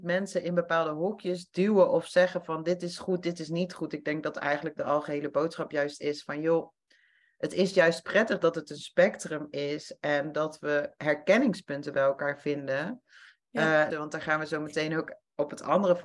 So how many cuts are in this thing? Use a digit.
1